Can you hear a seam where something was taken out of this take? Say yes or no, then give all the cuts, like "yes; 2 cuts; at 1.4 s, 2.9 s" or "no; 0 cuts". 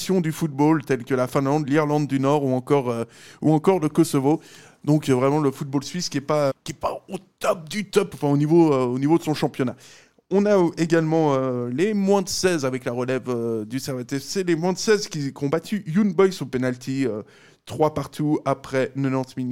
yes; 1 cut; at 6.5 s